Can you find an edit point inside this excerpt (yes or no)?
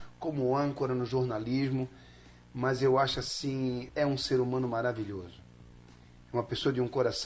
yes